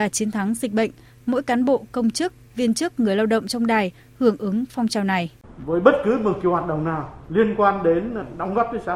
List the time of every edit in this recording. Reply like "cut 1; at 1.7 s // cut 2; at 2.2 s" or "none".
none